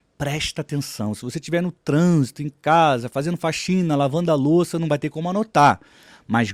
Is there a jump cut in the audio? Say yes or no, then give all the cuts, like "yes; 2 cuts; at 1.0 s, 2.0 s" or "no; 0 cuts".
no; 0 cuts